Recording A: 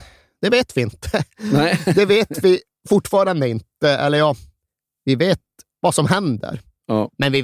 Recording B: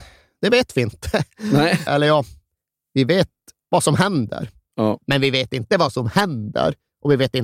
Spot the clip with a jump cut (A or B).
B